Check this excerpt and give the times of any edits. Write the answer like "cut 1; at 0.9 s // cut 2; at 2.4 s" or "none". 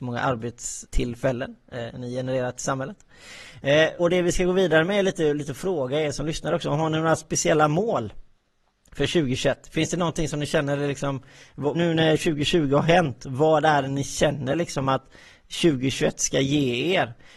cut 1; at 4.0 s // cut 2; at 11.7 s

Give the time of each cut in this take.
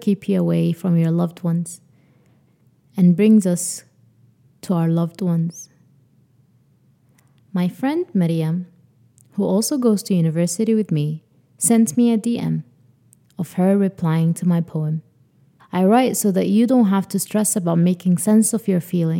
cut 1; at 7.4 s // cut 2; at 15.6 s

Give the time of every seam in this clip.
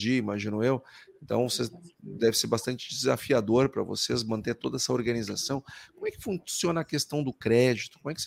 none

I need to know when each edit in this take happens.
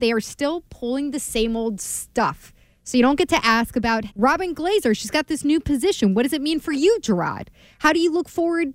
cut 1; at 4.1 s

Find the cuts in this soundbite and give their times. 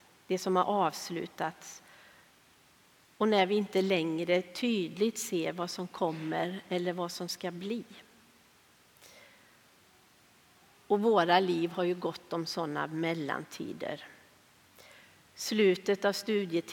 none

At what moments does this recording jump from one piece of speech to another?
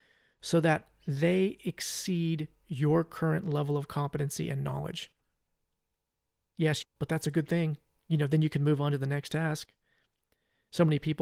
cut 1; at 6.8 s

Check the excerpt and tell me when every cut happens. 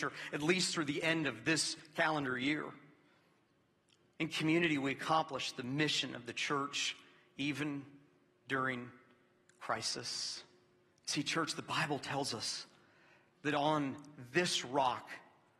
cut 1; at 10.9 s // cut 2; at 13.4 s

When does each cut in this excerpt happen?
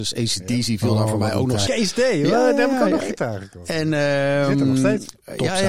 cut 1; at 1.7 s

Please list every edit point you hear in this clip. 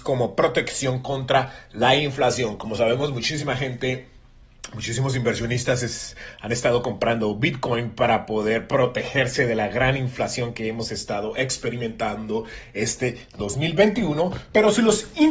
none

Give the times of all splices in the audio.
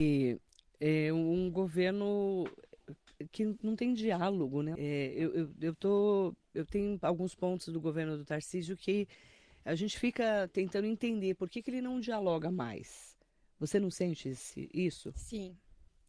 cut 1; at 4.8 s

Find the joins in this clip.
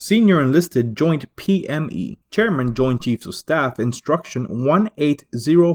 cut 1; at 2.2 s

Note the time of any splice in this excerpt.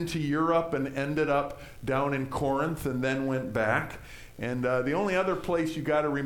none

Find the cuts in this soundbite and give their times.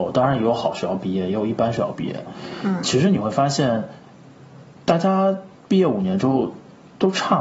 none

